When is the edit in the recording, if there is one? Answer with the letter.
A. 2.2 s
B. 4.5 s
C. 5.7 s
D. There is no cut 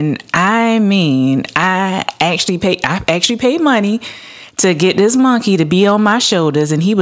D